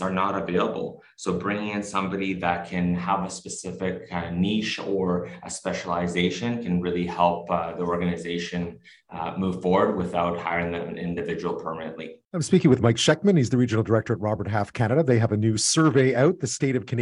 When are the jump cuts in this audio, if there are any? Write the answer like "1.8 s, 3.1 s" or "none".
12.2 s